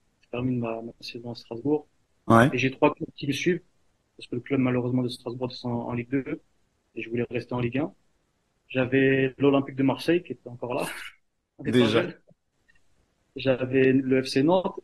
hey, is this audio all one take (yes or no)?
yes